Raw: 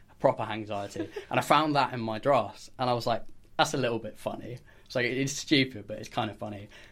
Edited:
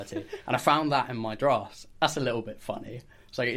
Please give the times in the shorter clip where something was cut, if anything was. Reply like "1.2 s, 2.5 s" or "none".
1.9 s